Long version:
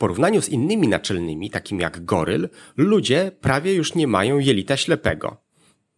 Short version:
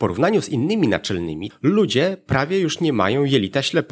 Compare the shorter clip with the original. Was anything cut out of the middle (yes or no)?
yes